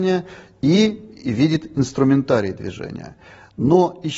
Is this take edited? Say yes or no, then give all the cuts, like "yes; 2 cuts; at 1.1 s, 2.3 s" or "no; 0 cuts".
no; 0 cuts